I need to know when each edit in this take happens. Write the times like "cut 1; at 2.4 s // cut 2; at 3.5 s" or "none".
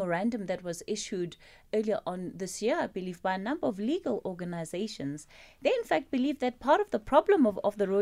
cut 1; at 1.7 s